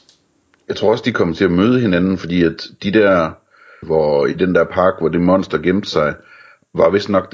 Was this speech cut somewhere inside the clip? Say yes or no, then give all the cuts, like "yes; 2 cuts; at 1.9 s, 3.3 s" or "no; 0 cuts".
yes; 1 cut; at 3.8 s